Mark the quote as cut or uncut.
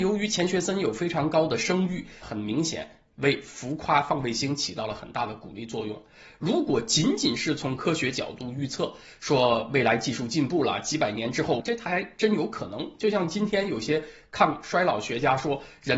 cut